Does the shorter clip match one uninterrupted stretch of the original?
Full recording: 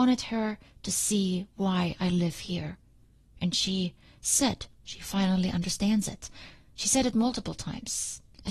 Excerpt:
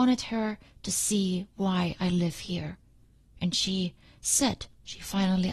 yes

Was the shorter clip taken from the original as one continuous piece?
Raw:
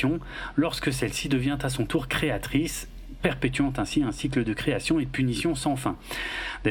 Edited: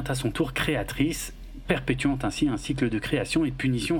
yes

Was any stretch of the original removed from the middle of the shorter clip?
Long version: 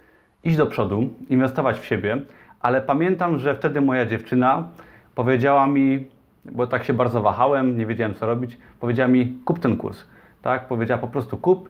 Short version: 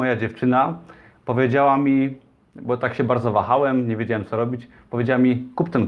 no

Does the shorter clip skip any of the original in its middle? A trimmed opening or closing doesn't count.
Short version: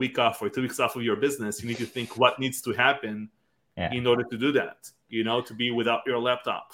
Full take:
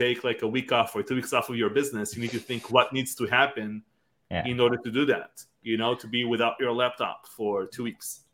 no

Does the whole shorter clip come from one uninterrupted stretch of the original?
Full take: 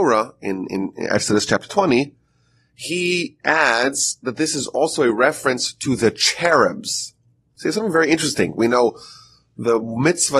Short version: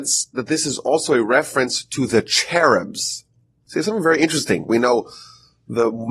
yes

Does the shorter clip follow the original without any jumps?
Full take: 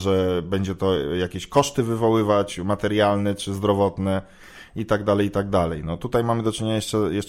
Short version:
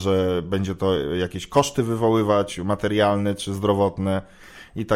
yes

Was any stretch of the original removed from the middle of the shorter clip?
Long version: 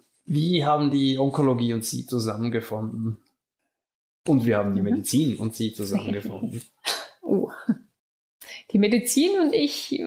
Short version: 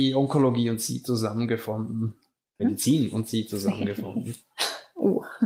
yes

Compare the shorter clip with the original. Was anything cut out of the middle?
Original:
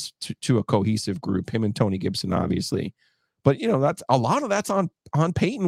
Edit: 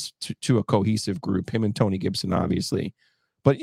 no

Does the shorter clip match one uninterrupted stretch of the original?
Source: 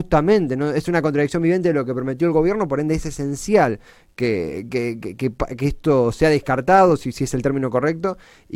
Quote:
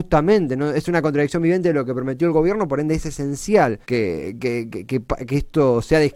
no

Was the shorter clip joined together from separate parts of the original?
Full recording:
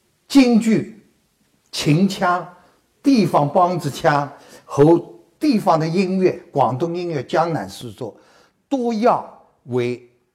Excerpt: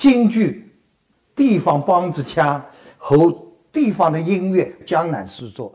yes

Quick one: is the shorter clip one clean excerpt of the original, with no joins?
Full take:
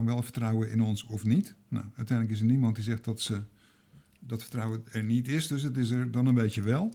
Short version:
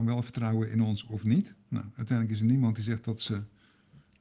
yes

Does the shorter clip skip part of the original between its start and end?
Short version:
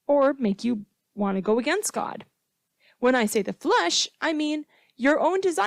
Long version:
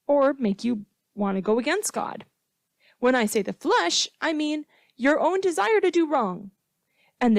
no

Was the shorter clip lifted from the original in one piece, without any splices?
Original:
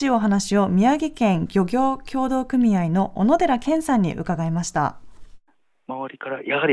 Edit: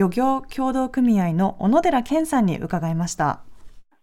yes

